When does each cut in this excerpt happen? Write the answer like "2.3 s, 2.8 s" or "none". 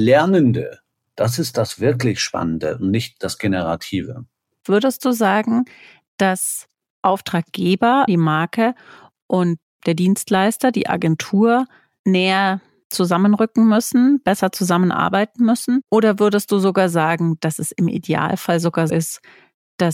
8.1 s, 18.9 s